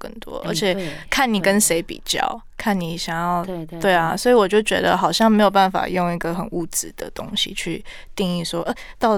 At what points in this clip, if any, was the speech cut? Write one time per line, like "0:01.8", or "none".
none